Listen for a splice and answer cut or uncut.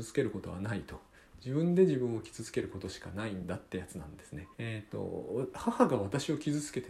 cut